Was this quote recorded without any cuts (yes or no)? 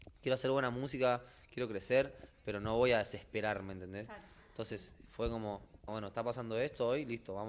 no